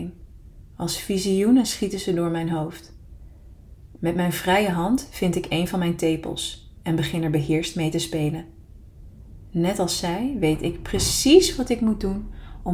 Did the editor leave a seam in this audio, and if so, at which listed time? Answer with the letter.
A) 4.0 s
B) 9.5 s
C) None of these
A